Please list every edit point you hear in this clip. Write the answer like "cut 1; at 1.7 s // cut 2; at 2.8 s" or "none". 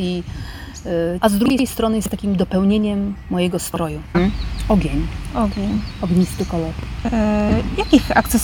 cut 1; at 1.2 s // cut 2; at 4.1 s